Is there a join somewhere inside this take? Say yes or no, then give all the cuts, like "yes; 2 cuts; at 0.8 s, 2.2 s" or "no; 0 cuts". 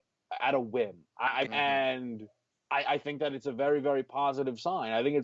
yes; 1 cut; at 1.5 s